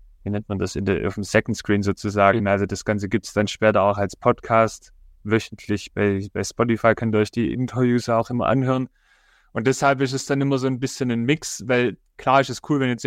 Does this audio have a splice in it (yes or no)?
yes